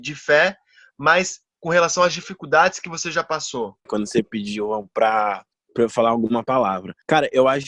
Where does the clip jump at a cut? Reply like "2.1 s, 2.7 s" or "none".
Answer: 3.9 s